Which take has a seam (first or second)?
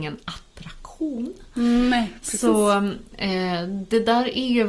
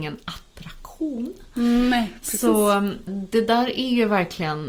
second